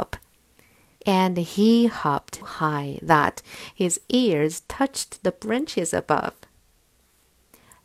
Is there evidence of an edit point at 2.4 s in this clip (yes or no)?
yes